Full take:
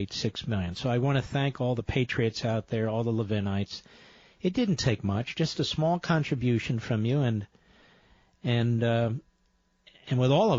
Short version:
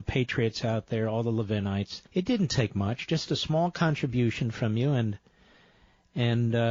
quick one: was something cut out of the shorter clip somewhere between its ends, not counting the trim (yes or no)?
yes